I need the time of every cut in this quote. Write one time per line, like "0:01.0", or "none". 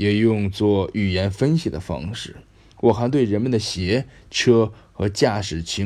none